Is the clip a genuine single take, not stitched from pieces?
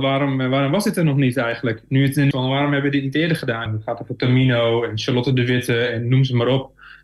no; 2 cuts; at 2.3 s, 3.7 s

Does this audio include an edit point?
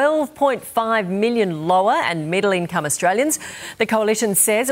no; 0 cuts

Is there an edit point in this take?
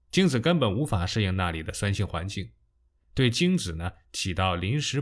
yes; 1 cut; at 3.0 s

